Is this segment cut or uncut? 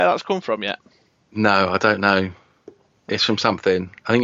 uncut